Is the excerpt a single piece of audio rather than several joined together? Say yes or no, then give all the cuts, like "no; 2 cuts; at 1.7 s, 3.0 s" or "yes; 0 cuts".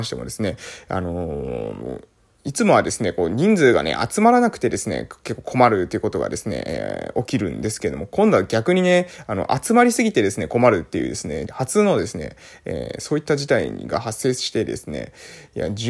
no; 1 cut; at 11.5 s